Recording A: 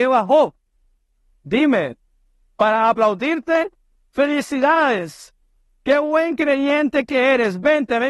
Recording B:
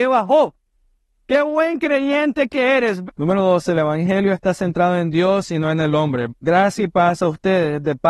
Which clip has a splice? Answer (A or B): B